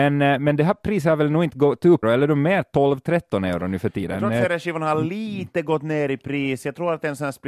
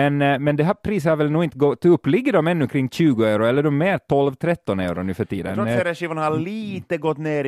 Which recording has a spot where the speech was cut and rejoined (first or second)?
first